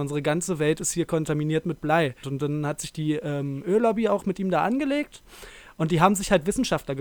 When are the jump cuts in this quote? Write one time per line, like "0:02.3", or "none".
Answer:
0:02.2